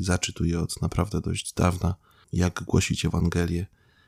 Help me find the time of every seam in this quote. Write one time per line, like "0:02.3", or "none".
0:02.2